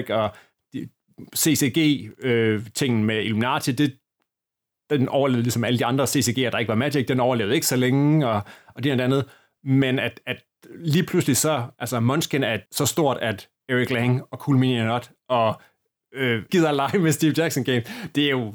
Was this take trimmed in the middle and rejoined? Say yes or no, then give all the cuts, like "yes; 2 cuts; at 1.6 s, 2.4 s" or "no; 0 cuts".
yes; 2 cuts; at 12.7 s, 16.5 s